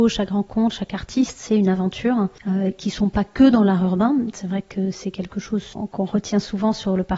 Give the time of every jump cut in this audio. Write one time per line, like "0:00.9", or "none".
none